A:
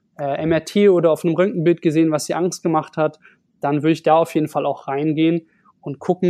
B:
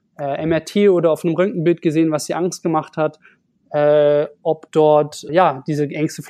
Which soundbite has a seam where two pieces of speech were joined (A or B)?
B